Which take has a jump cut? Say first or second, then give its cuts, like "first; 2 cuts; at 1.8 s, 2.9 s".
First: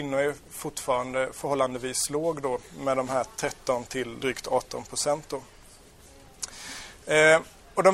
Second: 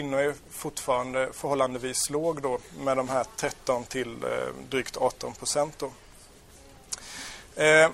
first; 1 cut; at 4.2 s